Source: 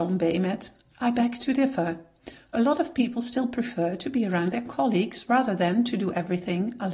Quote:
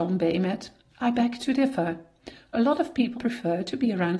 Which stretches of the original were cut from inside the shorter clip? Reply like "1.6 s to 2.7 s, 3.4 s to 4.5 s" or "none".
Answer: 3.1 s to 3.5 s